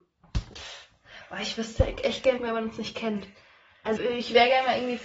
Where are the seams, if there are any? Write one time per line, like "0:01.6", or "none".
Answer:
0:02.4
0:04.0